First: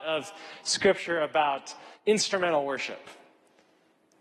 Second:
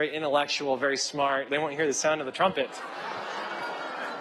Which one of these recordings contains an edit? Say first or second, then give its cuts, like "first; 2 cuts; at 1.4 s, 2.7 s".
second; 1 cut; at 1.5 s